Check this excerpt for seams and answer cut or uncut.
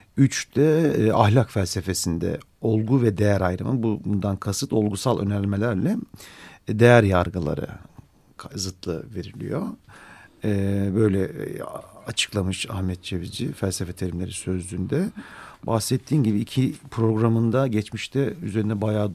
uncut